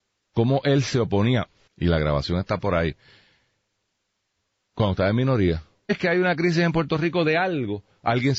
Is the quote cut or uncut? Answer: cut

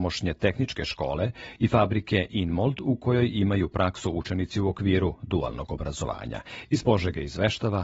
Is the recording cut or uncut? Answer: uncut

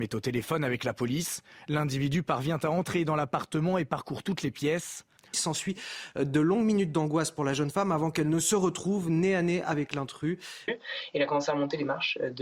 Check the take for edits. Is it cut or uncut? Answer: cut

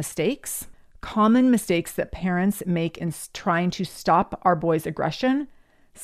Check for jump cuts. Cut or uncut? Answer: uncut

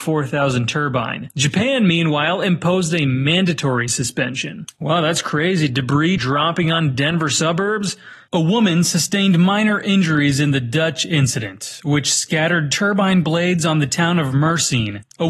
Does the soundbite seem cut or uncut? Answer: cut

